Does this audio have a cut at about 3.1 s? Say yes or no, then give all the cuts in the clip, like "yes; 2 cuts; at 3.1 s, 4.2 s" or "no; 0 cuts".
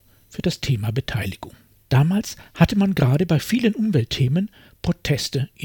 no; 1 cut; at 1.8 s